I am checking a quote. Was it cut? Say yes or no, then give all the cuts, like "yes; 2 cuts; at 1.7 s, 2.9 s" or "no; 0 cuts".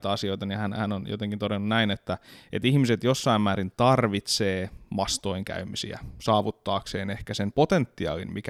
no; 0 cuts